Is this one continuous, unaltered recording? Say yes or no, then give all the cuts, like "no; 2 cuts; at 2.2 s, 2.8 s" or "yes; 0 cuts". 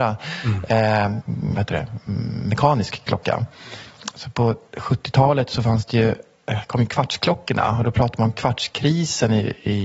no; 2 cuts; at 1.2 s, 4.1 s